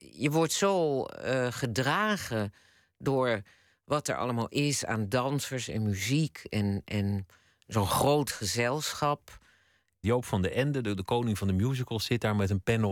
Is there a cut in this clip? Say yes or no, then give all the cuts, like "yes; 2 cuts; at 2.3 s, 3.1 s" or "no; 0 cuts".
yes; 2 cuts; at 10.0 s, 12.0 s